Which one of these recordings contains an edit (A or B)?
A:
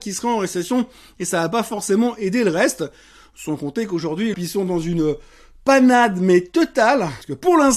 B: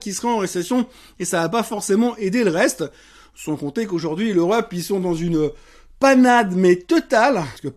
A